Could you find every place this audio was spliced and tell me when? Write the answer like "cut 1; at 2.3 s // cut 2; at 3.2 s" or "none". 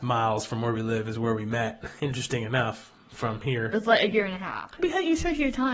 cut 1; at 3.7 s // cut 2; at 4.8 s